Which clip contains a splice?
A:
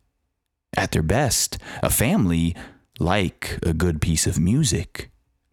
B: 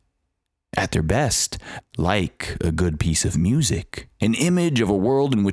B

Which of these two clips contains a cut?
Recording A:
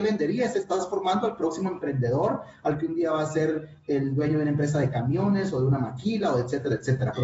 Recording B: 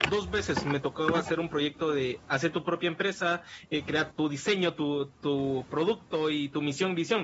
B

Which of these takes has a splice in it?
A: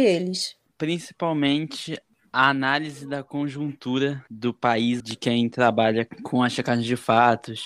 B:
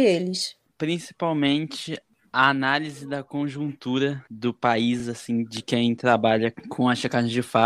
A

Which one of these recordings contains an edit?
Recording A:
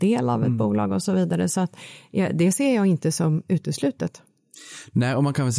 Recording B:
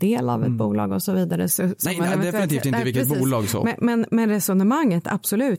B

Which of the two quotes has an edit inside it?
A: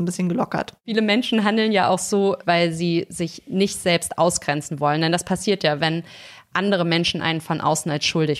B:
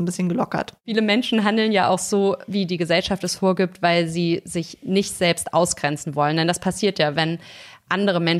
A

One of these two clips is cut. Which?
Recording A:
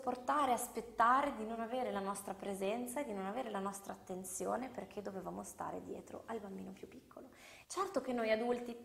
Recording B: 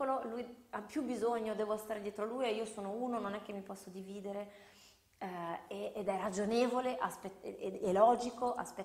A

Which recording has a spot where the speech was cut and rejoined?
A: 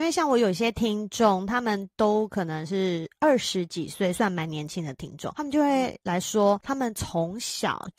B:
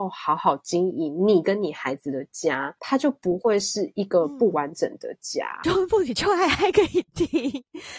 B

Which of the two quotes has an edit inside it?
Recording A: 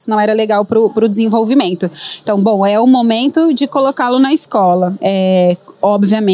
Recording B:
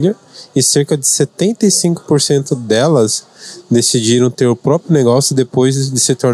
A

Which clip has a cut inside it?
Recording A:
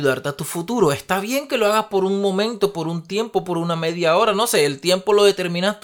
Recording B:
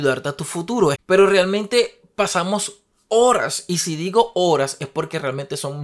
B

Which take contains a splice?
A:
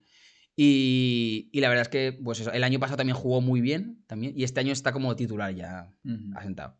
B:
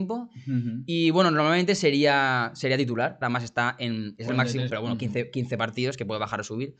B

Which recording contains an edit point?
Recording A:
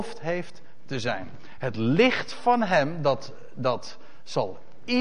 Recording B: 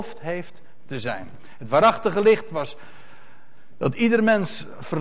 A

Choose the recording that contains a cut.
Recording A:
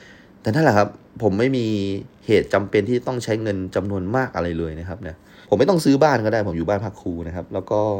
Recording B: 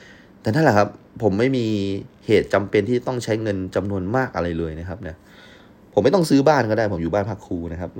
A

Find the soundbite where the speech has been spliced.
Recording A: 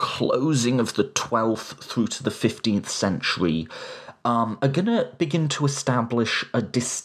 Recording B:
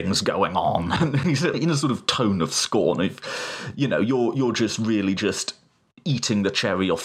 B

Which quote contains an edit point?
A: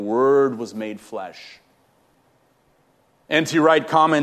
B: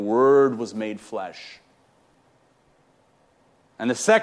A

